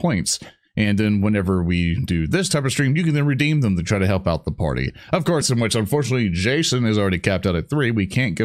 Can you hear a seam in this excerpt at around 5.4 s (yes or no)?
yes